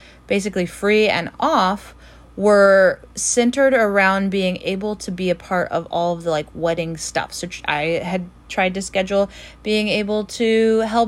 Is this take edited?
no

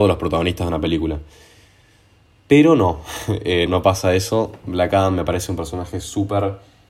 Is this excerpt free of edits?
no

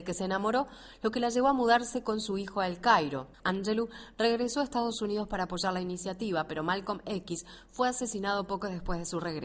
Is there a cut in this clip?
yes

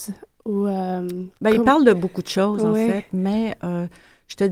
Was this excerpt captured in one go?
yes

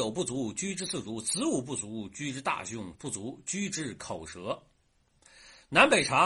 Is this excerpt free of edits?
no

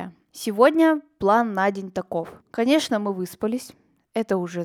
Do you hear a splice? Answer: no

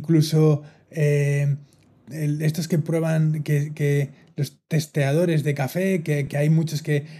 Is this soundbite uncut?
yes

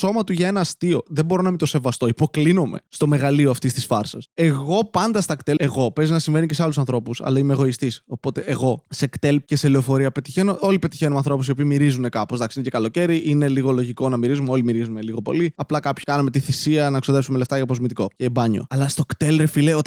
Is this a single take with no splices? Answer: yes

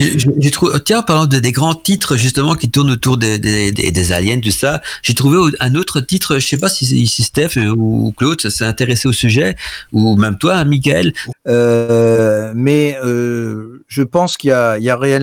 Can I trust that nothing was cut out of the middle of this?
no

